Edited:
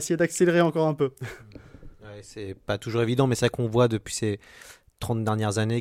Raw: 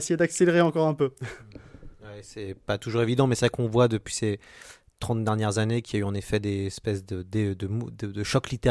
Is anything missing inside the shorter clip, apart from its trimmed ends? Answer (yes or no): no